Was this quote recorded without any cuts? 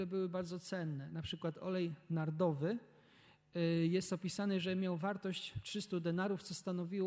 yes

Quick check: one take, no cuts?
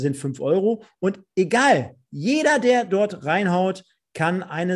yes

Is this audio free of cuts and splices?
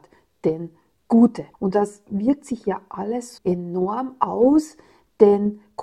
no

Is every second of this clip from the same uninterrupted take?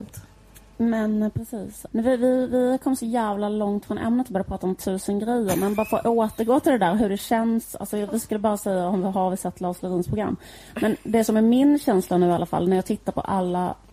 no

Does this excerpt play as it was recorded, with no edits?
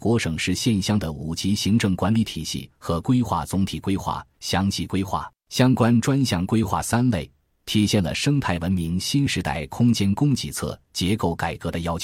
yes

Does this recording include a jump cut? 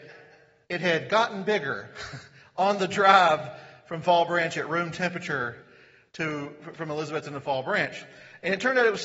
no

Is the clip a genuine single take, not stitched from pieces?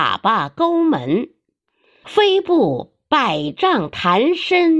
no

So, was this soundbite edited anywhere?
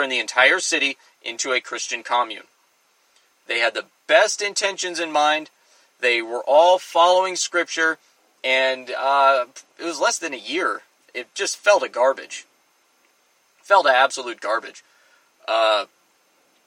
no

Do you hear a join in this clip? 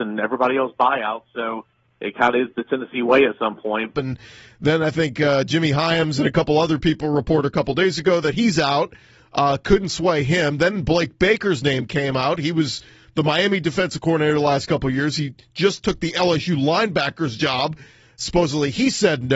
yes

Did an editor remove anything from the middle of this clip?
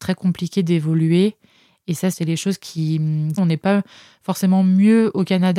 yes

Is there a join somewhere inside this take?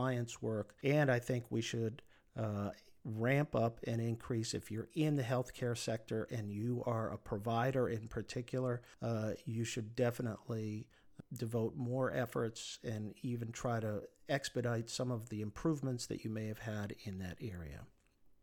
no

